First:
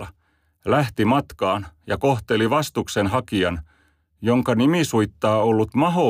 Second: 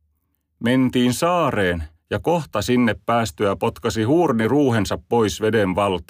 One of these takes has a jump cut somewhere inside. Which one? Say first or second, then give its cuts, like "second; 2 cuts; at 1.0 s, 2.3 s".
second; 1 cut; at 2.0 s